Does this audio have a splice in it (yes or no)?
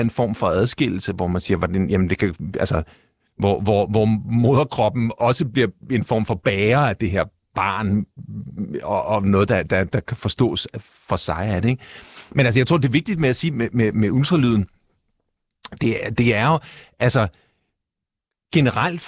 no